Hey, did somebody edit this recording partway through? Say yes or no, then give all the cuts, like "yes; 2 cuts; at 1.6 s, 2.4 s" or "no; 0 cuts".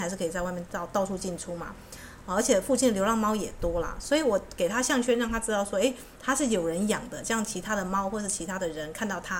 no; 0 cuts